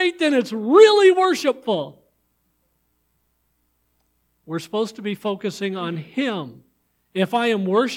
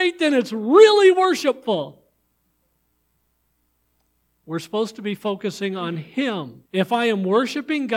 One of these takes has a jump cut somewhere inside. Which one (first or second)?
second